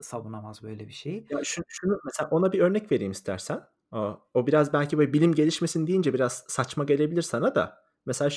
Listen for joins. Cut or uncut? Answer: uncut